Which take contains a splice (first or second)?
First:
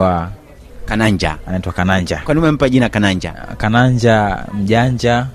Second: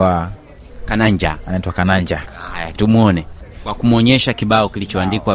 second